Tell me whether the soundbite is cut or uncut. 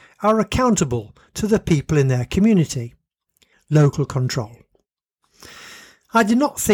cut